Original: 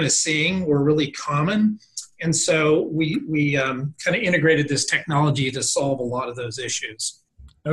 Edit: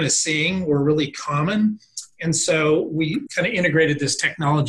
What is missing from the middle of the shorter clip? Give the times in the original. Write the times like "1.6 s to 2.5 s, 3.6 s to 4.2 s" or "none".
3.3 s to 4.0 s